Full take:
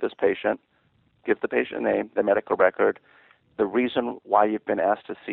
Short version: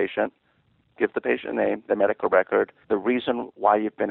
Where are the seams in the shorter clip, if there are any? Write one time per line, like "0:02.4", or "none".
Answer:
0:02.8